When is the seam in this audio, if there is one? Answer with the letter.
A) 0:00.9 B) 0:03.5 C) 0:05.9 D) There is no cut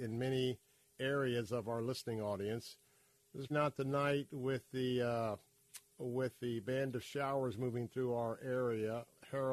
B